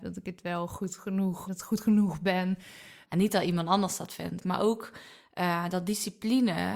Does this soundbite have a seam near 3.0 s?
yes; 3 cuts; at 1.5 s, 3.0 s, 4.4 s

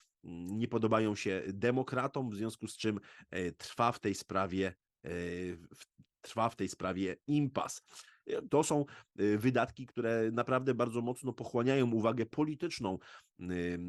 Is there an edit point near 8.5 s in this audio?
yes; 1 cut; at 8.5 s

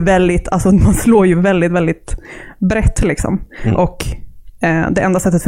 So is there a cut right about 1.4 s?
no; 0 cuts

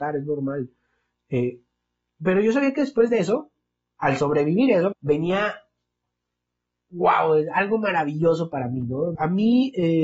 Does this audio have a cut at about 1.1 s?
no; 2 cuts; at 4.9 s, 9.2 s

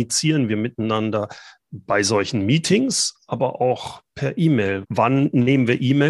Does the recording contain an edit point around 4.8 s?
yes; 1 cut; at 4.8 s

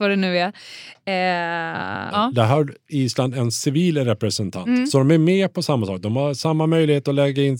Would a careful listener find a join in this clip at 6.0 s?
no; 1 cut; at 2.1 s

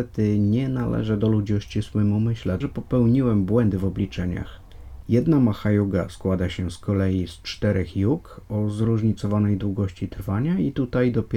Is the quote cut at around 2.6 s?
yes; 2 cuts; at 2.6 s, 5.0 s

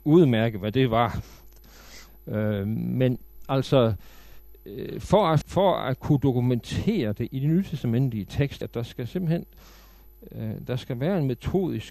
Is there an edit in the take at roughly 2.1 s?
no; 2 cuts; at 5.4 s, 8.6 s

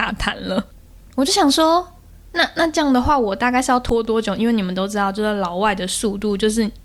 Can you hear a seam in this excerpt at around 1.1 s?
yes; 1 cut; at 1.1 s

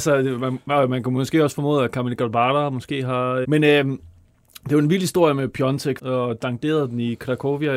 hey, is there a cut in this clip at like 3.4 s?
yes; 2 cuts; at 3.4 s, 6.0 s

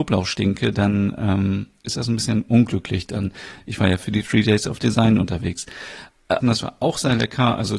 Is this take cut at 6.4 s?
yes; 1 cut; at 6.4 s

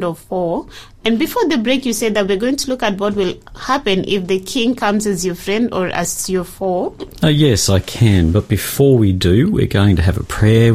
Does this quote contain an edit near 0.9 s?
no; 1 cut; at 7.2 s

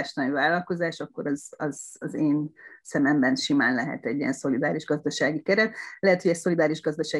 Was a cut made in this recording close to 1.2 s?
no; 0 cuts

